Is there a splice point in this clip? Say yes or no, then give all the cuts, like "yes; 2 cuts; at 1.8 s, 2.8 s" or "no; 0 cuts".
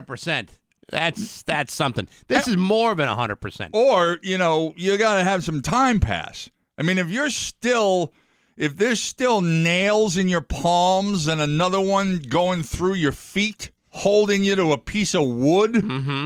yes; 1 cut; at 13.8 s